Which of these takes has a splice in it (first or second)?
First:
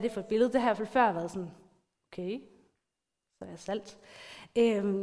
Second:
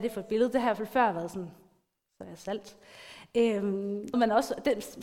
second